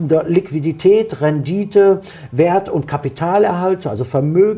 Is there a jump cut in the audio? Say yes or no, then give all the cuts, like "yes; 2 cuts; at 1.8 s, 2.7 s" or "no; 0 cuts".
no; 0 cuts